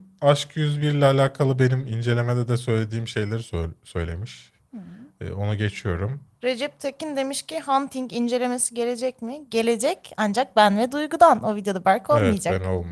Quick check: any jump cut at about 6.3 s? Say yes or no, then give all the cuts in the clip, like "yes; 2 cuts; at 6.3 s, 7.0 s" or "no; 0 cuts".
yes; 1 cut; at 6.3 s